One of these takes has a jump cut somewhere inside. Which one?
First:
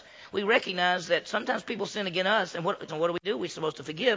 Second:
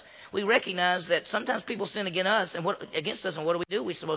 first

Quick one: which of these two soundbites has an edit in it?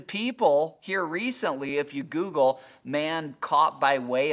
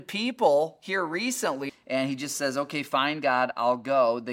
second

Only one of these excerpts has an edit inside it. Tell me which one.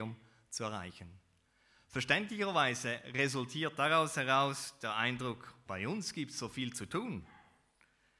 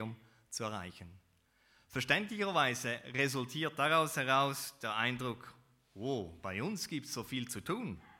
first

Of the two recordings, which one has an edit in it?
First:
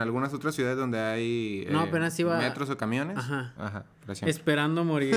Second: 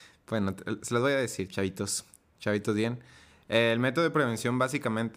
first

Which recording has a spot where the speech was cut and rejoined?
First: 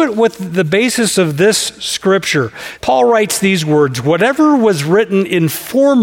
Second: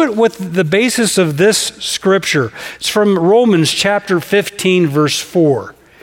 first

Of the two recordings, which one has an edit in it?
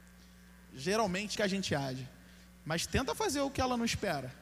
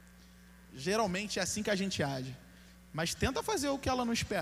first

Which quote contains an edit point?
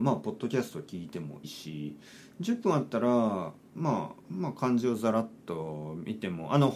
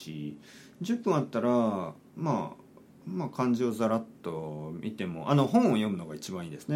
first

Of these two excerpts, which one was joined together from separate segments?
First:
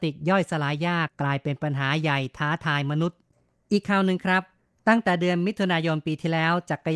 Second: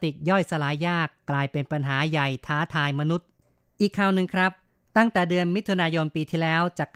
first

